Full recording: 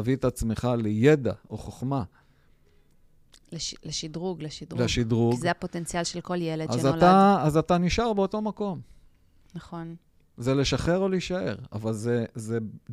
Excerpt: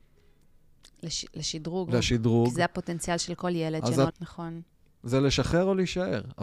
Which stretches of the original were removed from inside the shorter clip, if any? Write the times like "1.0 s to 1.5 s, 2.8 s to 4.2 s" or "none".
4.4 s to 4.7 s, 7.0 s to 9.4 s